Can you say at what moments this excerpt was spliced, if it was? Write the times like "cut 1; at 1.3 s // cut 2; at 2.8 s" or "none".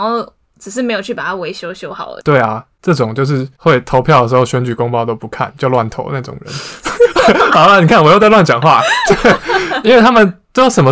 cut 1; at 2.2 s